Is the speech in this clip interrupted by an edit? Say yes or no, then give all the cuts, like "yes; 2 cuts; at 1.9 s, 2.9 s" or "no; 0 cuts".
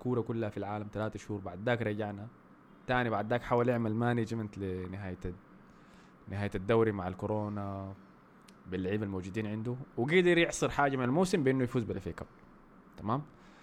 no; 0 cuts